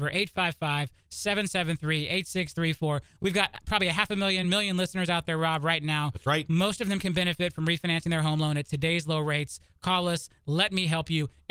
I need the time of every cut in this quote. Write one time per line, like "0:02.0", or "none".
none